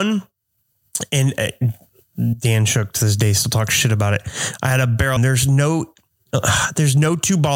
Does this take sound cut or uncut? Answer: cut